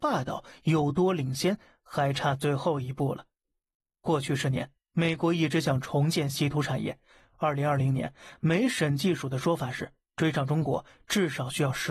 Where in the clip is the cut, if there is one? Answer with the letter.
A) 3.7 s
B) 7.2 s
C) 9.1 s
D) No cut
D